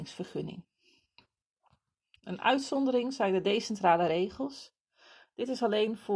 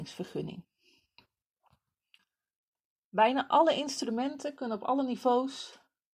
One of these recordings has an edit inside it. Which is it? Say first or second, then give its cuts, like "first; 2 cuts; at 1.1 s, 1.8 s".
first; 1 cut; at 2.2 s